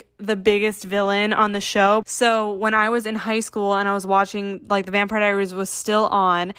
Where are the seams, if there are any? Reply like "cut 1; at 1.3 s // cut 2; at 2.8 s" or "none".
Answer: cut 1; at 2.0 s